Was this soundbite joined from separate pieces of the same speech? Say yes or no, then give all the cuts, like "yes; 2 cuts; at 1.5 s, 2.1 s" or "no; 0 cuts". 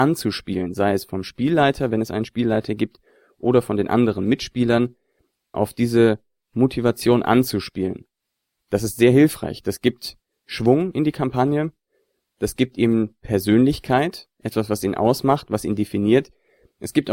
yes; 2 cuts; at 5.5 s, 8.6 s